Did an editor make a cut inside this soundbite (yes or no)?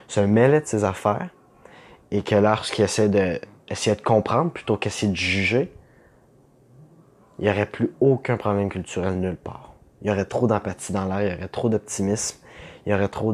yes